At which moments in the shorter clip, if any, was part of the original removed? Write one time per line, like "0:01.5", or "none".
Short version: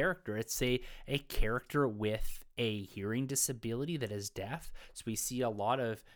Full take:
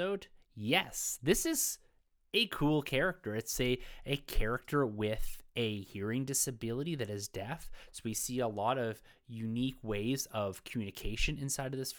none